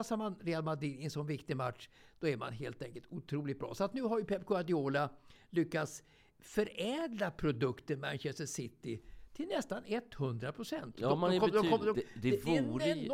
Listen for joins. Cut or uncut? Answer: cut